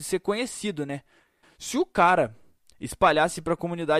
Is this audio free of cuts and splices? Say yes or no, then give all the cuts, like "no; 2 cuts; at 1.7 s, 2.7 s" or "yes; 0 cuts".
no; 1 cut; at 1.4 s